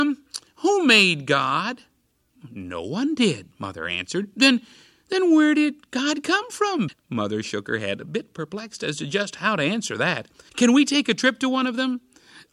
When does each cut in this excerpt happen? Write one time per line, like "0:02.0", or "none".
0:06.9
0:10.5